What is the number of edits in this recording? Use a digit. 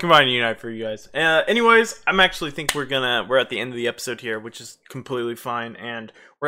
0